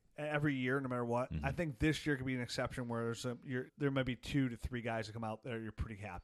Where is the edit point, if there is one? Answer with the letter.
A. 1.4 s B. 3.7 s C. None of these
B